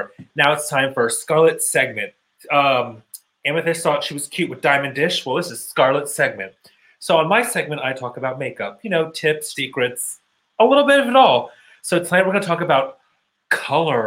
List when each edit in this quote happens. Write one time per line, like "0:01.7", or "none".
0:02.3
0:09.5

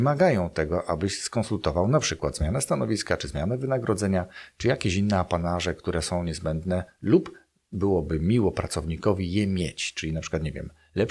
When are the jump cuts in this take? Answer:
none

